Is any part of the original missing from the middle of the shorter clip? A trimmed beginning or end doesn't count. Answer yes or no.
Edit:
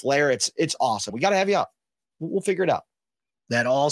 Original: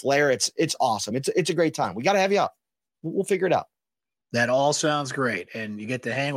yes